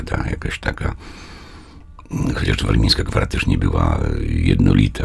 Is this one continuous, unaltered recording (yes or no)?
yes